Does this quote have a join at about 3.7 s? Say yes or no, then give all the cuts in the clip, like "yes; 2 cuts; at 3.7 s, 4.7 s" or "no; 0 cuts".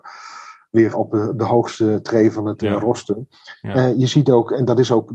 no; 1 cut; at 0.9 s